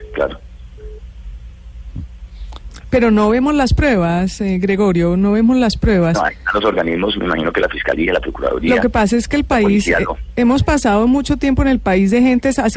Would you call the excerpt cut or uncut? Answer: uncut